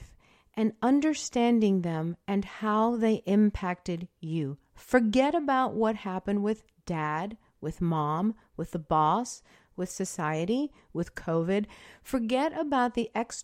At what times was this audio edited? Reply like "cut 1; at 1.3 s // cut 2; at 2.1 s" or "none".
none